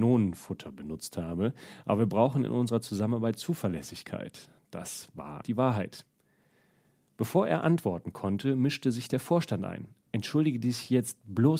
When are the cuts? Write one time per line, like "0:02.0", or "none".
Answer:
0:05.4